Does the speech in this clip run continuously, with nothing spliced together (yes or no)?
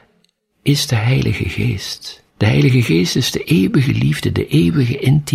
no